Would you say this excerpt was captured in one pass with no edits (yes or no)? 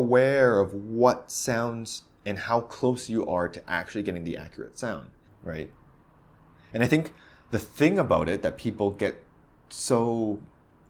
no